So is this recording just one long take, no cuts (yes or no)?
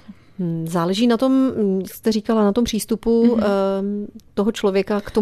yes